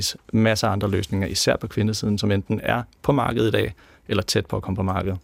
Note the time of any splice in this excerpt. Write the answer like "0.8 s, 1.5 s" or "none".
none